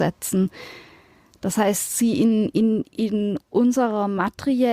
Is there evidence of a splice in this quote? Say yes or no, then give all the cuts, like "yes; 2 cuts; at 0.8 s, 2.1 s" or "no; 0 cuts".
no; 0 cuts